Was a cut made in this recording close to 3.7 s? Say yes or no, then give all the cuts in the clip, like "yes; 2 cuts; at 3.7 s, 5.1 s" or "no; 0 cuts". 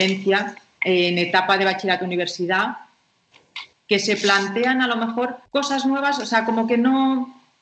yes; 2 cuts; at 3.7 s, 5.5 s